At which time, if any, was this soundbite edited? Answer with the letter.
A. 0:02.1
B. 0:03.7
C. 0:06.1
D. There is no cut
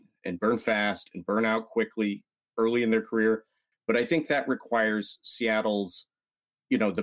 B